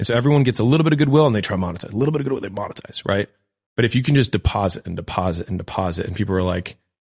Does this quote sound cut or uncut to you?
uncut